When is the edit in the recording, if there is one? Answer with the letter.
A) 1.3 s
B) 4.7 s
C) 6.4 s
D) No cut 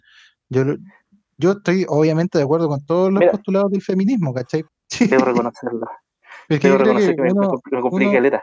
B